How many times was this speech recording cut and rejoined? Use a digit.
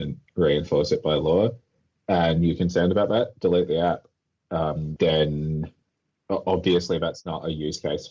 1